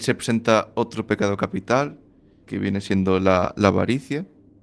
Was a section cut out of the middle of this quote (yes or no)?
yes